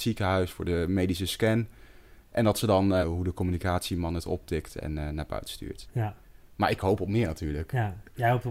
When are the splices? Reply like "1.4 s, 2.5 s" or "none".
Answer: 3.0 s, 5.9 s